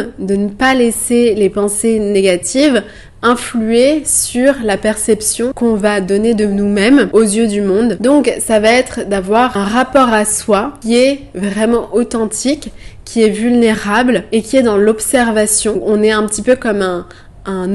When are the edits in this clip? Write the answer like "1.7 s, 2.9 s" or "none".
none